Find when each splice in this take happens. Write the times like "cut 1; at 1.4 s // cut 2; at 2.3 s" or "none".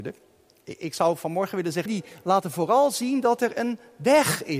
cut 1; at 1.9 s